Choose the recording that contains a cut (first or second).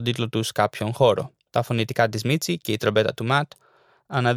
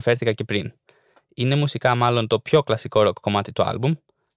first